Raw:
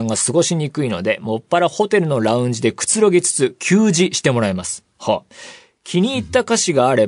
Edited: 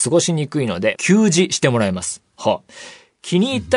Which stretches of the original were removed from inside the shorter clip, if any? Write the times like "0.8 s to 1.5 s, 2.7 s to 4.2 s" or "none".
1.2 s to 3.6 s